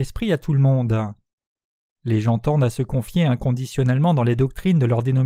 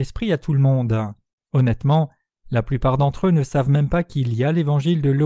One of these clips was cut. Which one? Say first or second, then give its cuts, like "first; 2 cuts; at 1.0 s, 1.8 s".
second; 1 cut; at 1.4 s